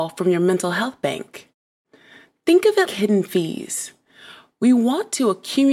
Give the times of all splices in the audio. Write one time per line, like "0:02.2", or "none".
0:02.9